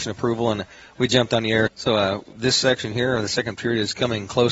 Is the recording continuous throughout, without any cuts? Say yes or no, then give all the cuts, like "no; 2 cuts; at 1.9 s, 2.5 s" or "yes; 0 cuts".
no; 1 cut; at 1.7 s